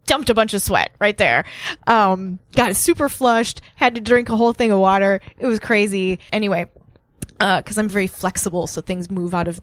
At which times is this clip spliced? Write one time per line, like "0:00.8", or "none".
0:06.3
0:07.9